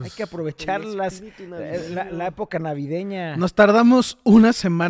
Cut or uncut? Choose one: uncut